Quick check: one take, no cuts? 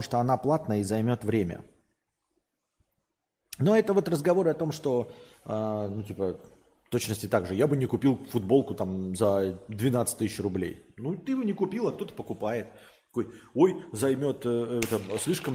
yes; 0 cuts

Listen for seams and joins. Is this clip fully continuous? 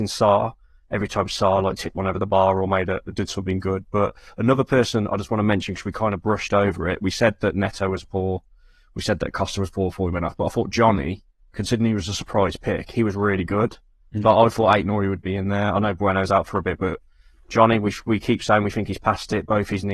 yes; 0 cuts

